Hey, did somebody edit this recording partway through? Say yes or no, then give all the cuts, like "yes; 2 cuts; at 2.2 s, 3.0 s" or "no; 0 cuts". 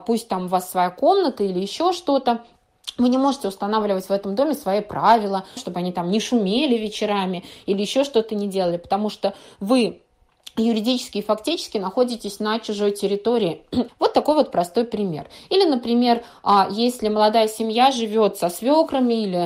yes; 2 cuts; at 5.6 s, 13.9 s